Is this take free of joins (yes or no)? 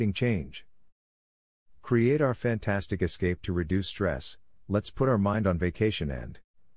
yes